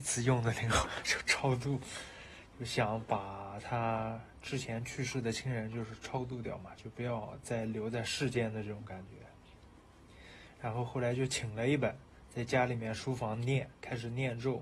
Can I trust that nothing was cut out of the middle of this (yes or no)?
yes